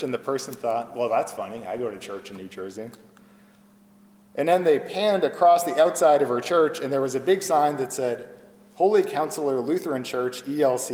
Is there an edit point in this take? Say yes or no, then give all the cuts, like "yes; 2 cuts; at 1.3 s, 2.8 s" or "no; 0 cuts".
no; 0 cuts